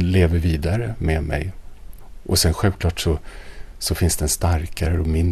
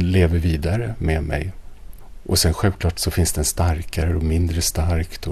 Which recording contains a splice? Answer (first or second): second